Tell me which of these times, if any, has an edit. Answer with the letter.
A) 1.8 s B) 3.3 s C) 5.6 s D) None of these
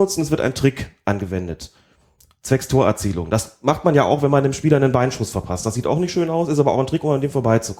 D